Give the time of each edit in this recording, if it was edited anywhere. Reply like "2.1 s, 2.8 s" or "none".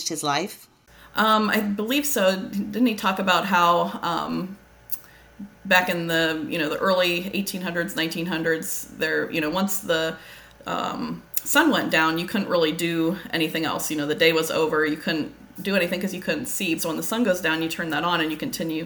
16.8 s